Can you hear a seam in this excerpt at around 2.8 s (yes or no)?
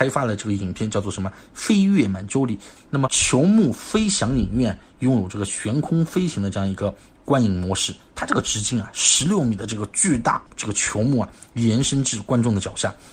yes